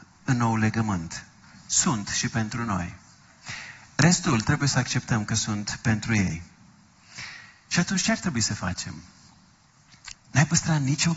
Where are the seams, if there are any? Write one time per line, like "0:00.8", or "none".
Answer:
0:10.1